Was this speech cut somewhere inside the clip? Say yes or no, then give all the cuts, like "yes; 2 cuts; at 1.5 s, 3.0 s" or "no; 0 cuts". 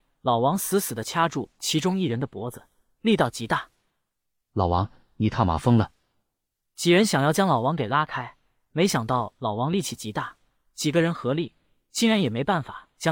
no; 0 cuts